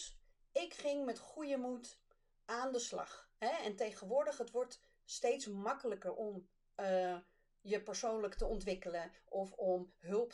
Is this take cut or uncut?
uncut